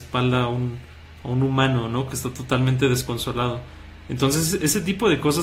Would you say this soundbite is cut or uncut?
uncut